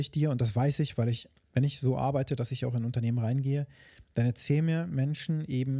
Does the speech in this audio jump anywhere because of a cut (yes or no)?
no